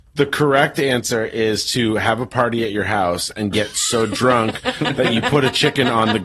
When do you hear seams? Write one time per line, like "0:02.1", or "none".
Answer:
none

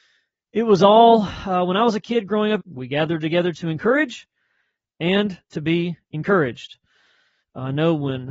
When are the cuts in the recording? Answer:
0:02.6

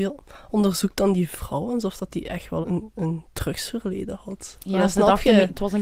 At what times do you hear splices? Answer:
0:02.6

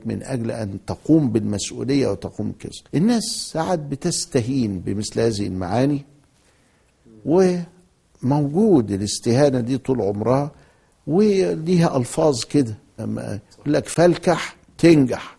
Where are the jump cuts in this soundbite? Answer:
0:02.9
0:13.0

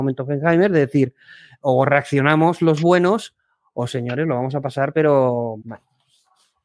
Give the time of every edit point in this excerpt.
0:05.6

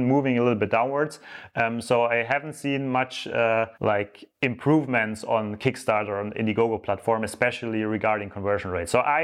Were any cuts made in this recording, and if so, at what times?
0:03.7

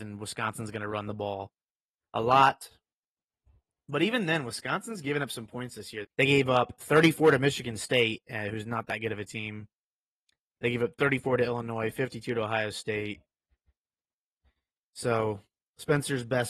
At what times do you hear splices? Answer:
0:06.0

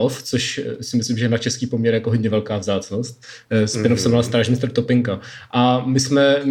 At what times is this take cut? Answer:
none

